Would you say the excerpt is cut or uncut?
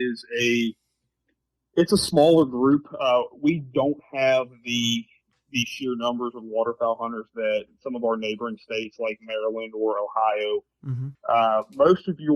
cut